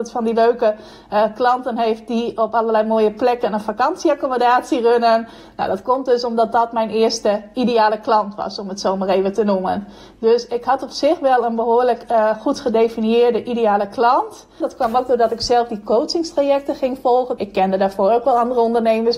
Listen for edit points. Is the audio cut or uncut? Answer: cut